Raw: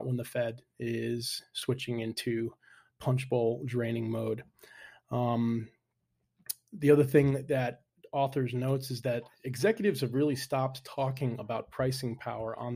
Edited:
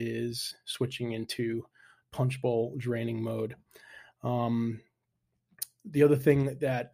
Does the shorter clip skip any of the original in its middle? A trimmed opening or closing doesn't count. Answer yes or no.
no